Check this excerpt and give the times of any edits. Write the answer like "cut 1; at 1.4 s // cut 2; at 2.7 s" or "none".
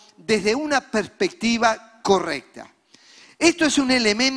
cut 1; at 3.3 s